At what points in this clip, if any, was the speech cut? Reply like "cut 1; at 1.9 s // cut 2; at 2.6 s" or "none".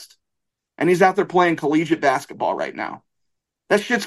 none